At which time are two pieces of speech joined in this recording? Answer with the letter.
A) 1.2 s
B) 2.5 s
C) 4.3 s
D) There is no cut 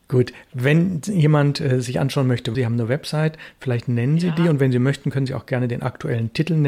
B